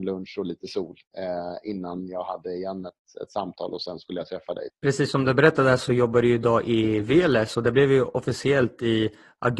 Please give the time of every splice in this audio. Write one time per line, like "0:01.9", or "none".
0:04.7